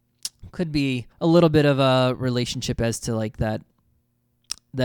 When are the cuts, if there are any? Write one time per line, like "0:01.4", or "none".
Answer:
0:01.1